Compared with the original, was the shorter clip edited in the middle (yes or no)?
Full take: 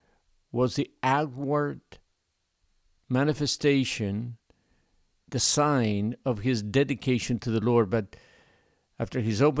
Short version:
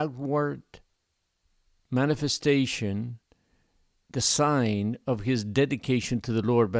no